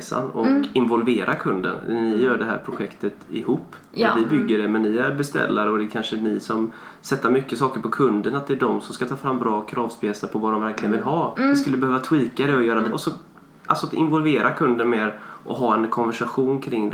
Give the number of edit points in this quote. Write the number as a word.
two